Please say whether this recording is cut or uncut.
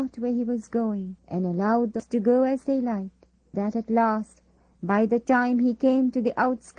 cut